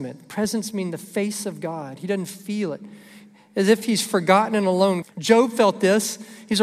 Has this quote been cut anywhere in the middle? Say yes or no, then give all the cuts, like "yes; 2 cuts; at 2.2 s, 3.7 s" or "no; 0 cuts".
yes; 1 cut; at 5.0 s